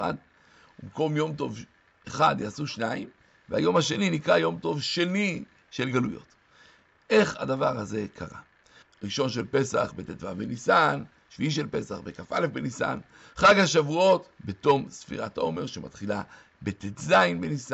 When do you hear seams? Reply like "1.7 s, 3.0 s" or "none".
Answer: 8.8 s, 14.4 s